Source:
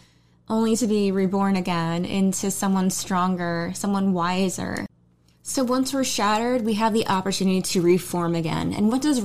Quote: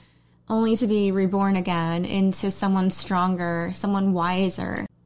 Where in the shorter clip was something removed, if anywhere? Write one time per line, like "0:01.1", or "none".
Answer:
none